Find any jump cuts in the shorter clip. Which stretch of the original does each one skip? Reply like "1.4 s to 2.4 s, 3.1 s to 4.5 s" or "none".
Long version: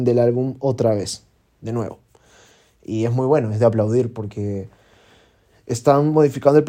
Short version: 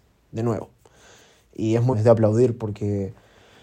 3.2 s to 3.5 s